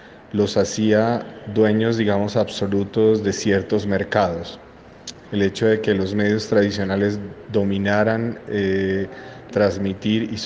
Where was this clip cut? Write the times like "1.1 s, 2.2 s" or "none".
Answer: 5.3 s, 9.5 s